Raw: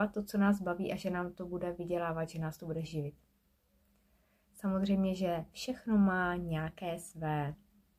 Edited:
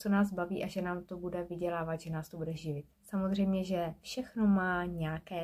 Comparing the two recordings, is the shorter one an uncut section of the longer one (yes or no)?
no